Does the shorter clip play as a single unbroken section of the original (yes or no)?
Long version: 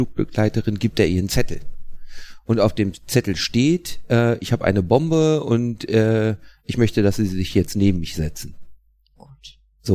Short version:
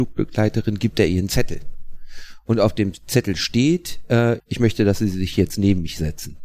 no